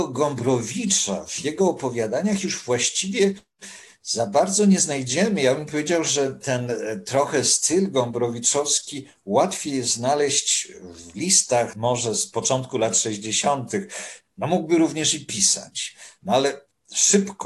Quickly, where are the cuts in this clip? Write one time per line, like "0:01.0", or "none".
0:14.2